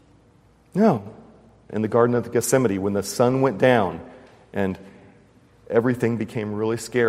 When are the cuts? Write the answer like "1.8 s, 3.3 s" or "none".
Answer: 1.7 s